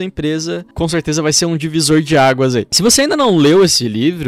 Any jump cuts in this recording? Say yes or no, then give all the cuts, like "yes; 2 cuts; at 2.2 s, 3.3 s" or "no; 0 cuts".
no; 0 cuts